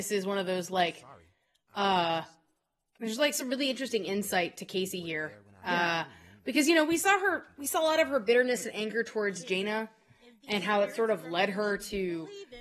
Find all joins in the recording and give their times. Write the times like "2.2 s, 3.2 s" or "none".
none